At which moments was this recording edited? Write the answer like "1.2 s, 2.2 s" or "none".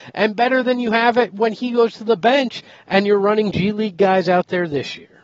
none